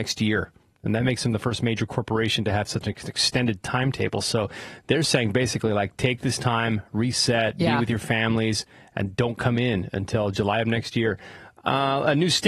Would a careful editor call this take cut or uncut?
uncut